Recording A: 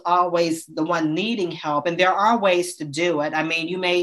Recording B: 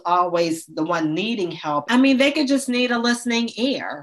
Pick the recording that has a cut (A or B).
B